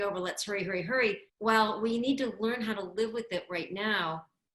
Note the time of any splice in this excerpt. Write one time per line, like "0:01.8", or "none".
0:01.3